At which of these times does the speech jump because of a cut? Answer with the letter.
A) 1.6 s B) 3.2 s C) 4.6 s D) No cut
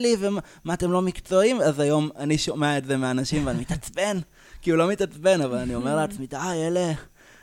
D